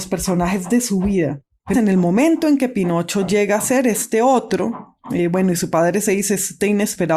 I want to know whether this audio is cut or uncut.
cut